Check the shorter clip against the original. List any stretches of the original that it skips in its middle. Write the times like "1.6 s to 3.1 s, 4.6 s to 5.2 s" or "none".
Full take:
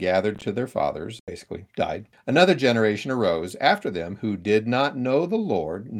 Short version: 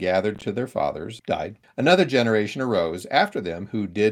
1.2 s to 1.7 s